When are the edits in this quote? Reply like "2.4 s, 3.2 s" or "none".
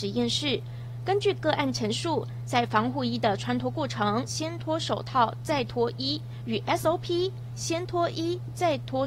4.3 s